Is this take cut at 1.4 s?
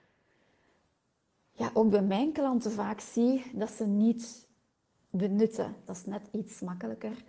no; 1 cut; at 5.9 s

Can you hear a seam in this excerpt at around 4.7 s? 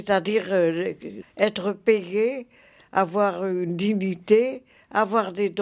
no; 1 cut; at 1.2 s

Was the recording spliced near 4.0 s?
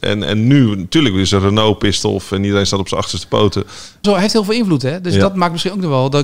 yes; 1 cut; at 4.0 s

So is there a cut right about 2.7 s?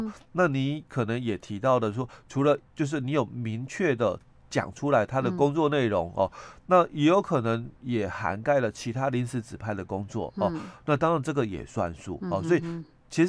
yes; 1 cut; at 2.7 s

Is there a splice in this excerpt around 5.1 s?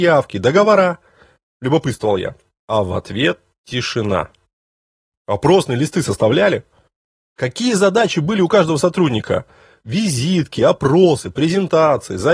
yes; 1 cut; at 5.1 s

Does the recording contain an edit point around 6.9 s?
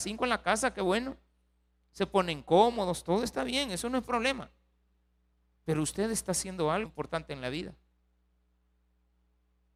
yes; 1 cut; at 6.9 s

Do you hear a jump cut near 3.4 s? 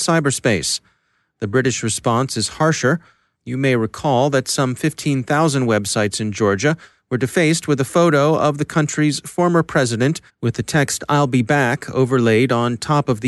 yes; 2 cuts; at 3.4 s, 10.3 s

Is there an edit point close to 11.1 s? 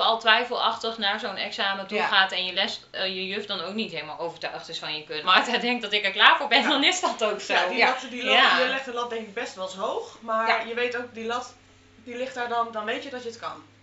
no; 1 cut; at 5.2 s

